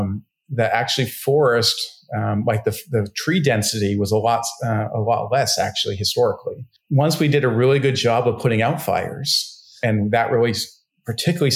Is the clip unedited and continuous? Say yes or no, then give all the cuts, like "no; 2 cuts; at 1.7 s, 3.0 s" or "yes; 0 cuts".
yes; 0 cuts